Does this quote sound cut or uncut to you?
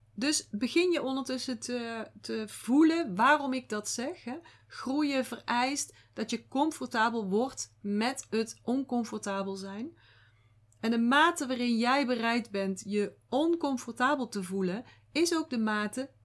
uncut